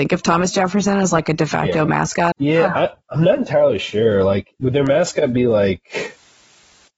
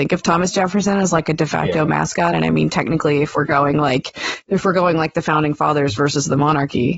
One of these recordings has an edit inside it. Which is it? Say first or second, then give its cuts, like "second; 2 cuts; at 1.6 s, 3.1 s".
first; 2 cuts; at 2.3 s, 4.6 s